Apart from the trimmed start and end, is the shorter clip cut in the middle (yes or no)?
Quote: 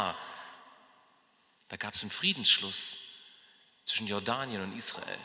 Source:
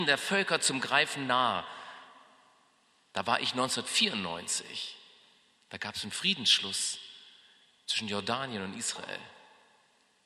yes